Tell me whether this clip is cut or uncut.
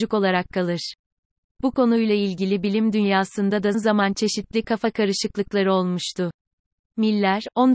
cut